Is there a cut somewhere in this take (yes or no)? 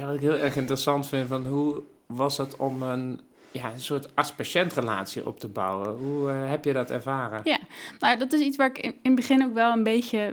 no